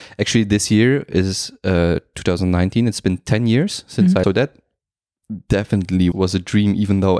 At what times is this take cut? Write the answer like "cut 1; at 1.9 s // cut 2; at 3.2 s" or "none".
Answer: cut 1; at 4.2 s // cut 2; at 6.1 s